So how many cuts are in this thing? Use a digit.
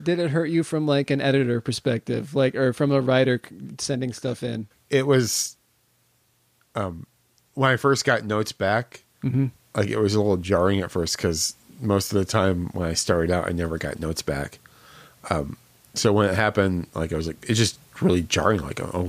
1